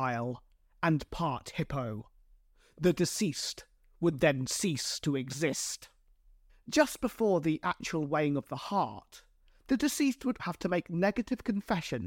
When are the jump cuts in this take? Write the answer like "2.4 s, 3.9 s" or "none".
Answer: 6.5 s, 10.4 s